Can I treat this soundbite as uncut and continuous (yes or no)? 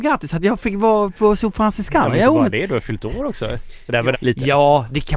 no